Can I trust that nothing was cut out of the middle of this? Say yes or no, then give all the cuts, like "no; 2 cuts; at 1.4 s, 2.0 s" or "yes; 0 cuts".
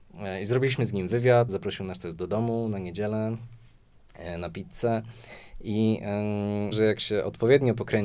no; 2 cuts; at 1.5 s, 6.7 s